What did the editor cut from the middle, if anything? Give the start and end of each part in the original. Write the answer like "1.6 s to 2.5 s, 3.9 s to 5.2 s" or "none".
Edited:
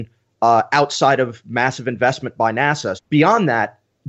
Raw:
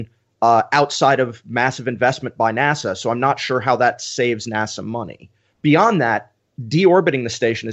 3.0 s to 5.5 s